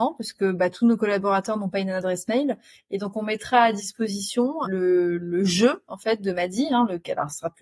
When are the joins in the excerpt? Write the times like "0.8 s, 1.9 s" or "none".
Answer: none